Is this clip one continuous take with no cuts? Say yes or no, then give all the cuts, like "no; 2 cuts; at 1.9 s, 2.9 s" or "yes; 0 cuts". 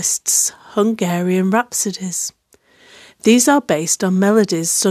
yes; 0 cuts